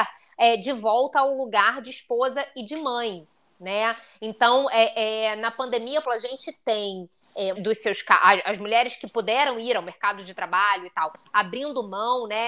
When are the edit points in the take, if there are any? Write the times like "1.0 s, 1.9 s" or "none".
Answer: 6.0 s, 7.6 s